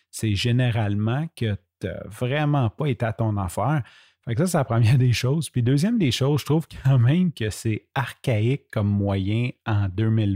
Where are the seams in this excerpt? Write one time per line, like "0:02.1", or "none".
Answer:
none